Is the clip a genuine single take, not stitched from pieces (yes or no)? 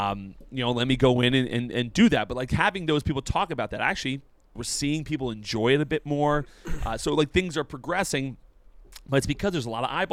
no